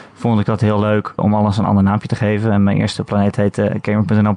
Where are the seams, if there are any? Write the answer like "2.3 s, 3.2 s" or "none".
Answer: 1.2 s

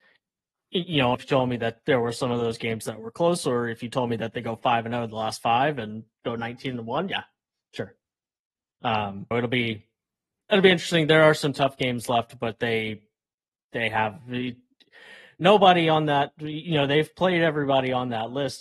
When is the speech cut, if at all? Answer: 1.1 s, 9.3 s

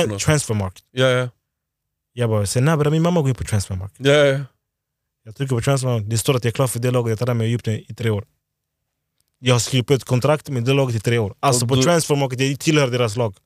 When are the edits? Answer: none

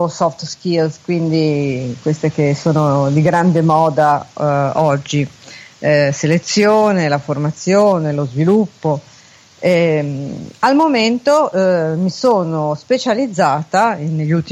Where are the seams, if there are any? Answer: none

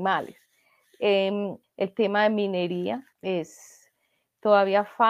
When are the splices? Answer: 1.6 s, 3.1 s

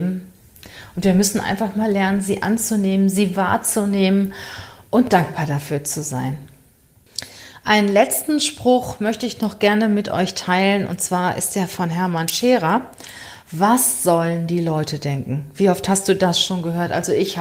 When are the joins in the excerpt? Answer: none

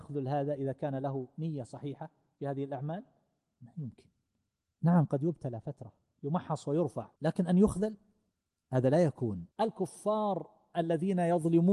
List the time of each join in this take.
7.2 s, 9.5 s

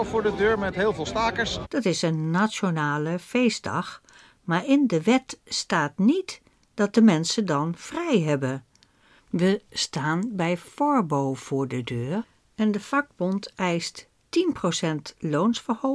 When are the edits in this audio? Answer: 1.6 s, 9.2 s

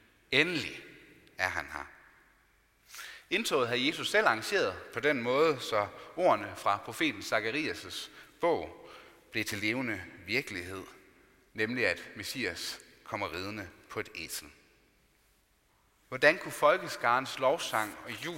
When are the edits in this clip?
16.0 s

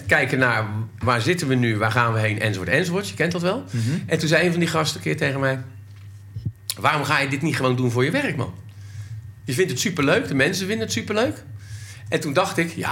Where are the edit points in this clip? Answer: none

